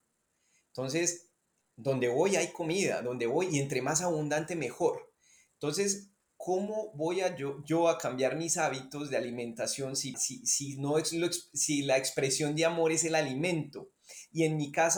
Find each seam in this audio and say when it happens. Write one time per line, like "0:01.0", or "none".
0:10.1

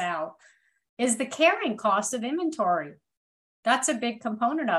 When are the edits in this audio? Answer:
none

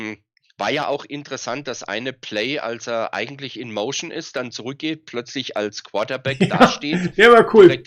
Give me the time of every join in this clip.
none

